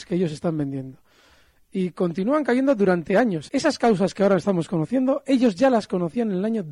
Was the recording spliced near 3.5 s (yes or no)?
yes